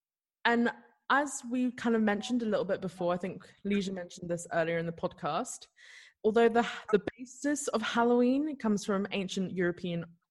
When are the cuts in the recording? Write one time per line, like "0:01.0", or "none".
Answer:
0:06.2